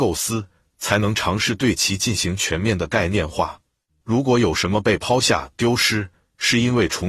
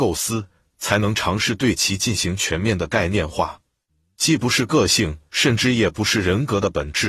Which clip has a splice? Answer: first; 1 cut; at 4.0 s

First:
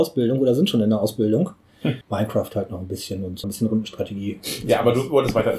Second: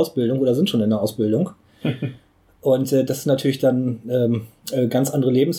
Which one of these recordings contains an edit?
first; 2 cuts; at 2.0 s, 3.4 s

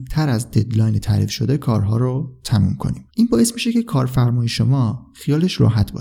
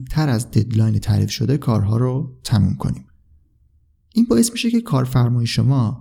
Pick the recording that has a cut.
first; 1 cut; at 3.1 s

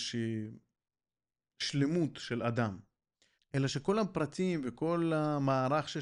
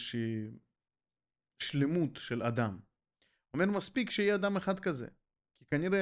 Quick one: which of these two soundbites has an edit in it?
first; 1 cut; at 3.4 s

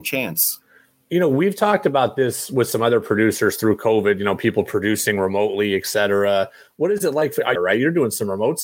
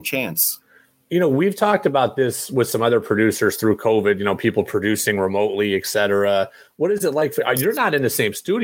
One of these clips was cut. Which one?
first; 1 cut; at 7.5 s

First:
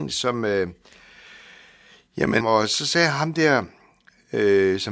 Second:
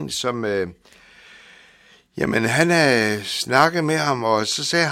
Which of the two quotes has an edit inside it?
first; 1 cut; at 2.4 s

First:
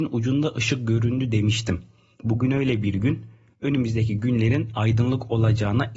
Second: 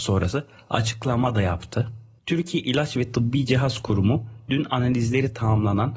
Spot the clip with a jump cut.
second; 1 cut; at 2.2 s

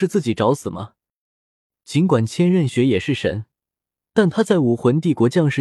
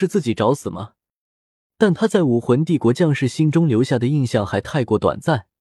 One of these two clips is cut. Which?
second; 1 cut; at 1.8 s

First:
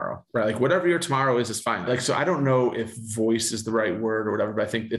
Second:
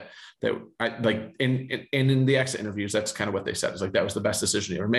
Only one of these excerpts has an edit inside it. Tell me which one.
first; 1 cut; at 1.9 s

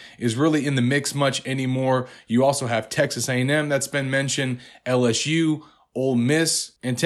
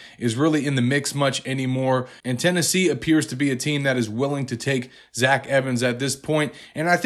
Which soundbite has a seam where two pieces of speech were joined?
second; 1 cut; at 2.2 s

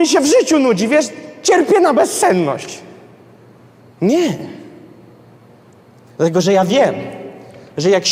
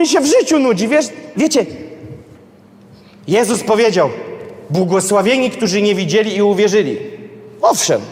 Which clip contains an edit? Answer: second; 1 cut; at 1.3 s

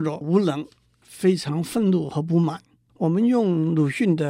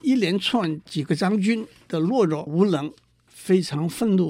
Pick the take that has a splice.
first; 1 cut; at 2.9 s

